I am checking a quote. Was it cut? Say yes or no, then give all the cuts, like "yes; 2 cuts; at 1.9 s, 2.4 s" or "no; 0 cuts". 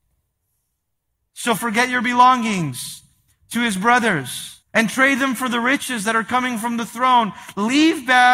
yes; 2 cuts; at 1.6 s, 4.6 s